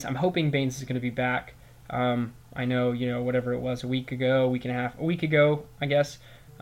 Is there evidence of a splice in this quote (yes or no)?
no